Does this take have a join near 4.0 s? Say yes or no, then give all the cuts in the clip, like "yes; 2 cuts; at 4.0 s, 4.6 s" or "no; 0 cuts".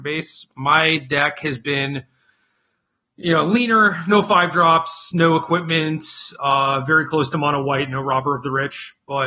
no; 0 cuts